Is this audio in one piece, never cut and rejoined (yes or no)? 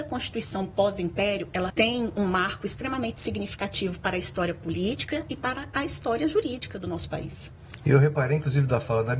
no